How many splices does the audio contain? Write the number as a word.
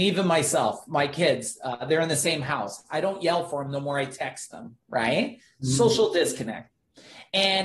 zero